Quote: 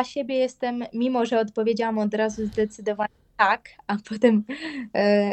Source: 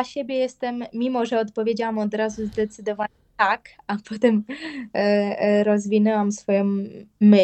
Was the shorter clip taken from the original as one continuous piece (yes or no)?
yes